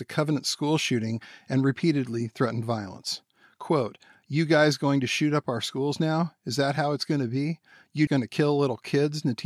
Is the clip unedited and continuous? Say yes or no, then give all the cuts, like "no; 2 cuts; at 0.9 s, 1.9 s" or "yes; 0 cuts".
no; 1 cut; at 8.1 s